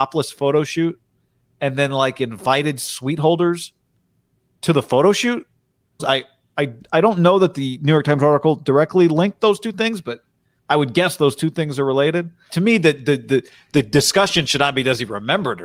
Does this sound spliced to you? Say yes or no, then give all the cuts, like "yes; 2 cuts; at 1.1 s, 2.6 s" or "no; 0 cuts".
yes; 2 cuts; at 6.0 s, 12.5 s